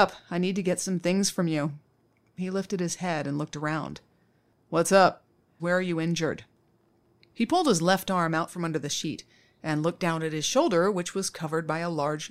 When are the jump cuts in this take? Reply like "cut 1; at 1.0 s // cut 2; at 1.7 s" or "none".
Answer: cut 1; at 5.6 s